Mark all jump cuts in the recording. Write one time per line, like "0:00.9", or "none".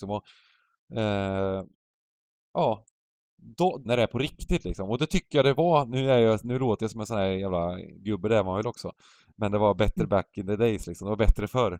0:03.9